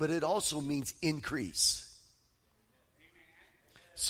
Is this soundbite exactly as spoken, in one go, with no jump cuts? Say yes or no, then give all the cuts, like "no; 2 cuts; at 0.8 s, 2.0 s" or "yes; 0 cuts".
yes; 0 cuts